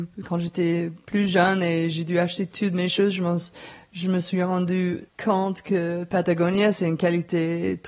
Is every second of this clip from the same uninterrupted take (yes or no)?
no